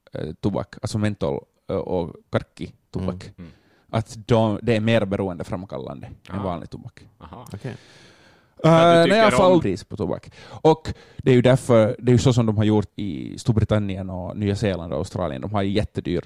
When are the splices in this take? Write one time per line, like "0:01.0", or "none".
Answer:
0:09.6
0:12.9